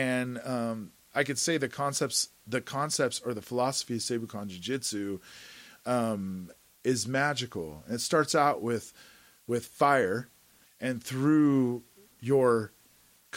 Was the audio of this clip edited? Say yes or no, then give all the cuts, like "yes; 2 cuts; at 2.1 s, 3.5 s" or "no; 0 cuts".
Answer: yes; 1 cut; at 10.6 s